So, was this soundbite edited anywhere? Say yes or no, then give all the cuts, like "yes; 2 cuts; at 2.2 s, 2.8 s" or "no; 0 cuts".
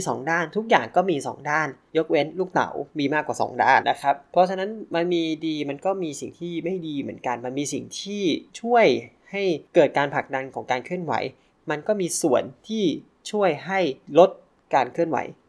yes; 1 cut; at 3.8 s